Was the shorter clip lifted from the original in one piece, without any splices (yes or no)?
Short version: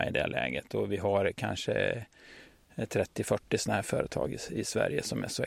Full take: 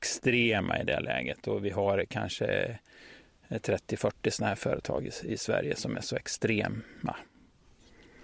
yes